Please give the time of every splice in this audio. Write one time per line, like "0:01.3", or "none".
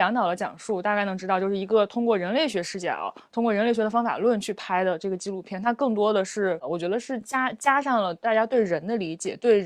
none